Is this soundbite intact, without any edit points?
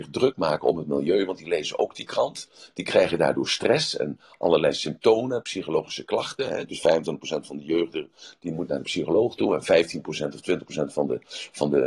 yes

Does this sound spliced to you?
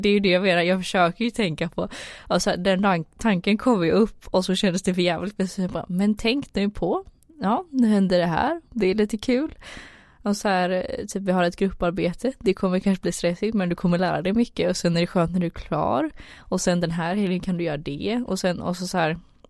no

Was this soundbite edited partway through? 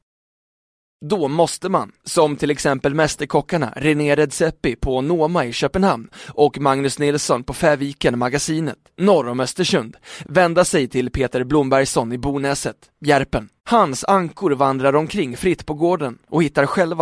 yes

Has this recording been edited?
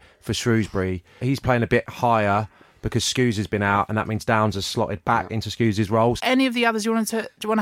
yes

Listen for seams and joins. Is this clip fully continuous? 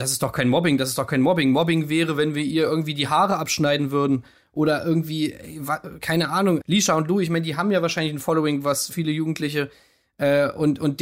no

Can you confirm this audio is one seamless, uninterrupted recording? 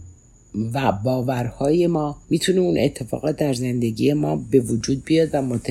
no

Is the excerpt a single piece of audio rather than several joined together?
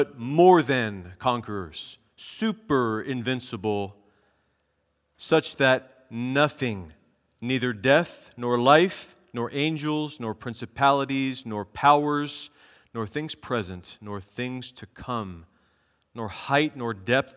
yes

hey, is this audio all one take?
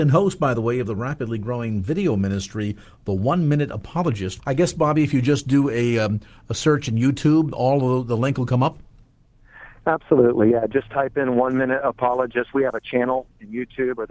no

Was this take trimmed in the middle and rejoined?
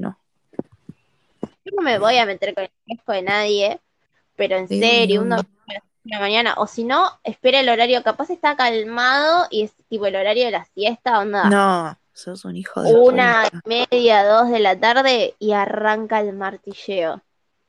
yes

